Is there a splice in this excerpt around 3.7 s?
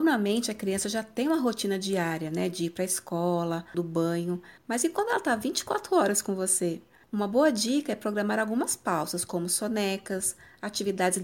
yes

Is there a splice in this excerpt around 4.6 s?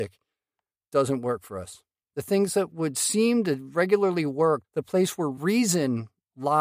yes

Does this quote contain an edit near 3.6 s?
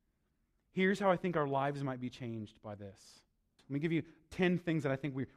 yes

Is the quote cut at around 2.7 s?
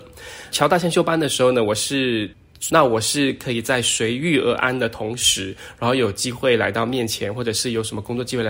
yes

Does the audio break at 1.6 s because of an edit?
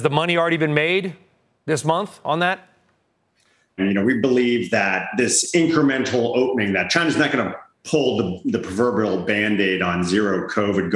no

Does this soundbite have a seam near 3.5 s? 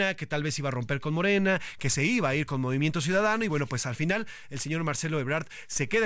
no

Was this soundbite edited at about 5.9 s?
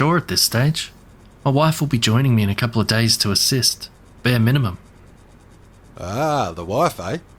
no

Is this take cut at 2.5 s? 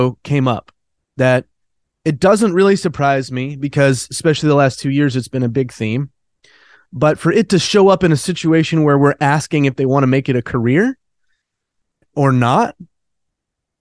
no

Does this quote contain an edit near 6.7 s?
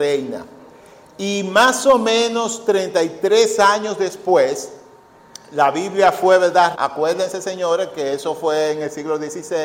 yes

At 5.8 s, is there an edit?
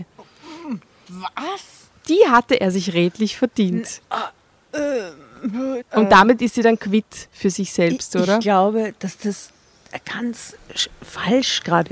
yes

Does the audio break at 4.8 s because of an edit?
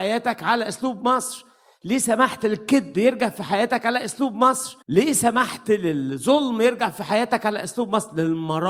yes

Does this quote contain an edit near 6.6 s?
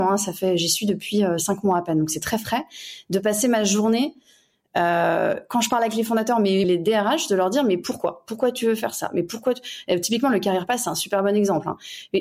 yes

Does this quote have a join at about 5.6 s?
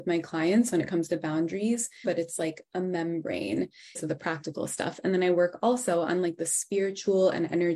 no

